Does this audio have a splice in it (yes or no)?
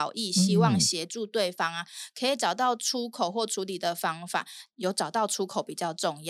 yes